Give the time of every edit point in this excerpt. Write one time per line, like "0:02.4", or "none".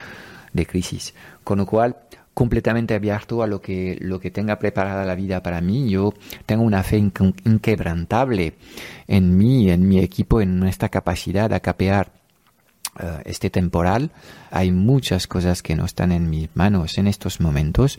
0:14.5